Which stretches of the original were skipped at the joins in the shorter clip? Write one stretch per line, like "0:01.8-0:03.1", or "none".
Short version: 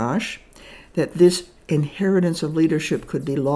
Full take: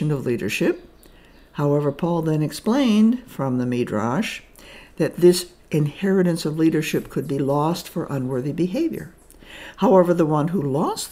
none